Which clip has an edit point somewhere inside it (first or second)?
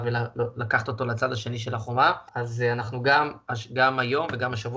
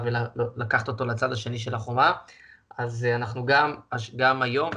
first